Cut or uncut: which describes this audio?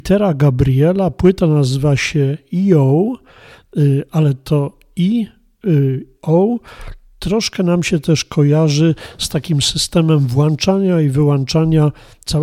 cut